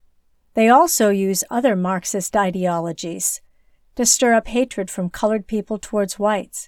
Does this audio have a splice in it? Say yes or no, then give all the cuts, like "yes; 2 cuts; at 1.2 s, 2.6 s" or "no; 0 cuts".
yes; 1 cut; at 3.8 s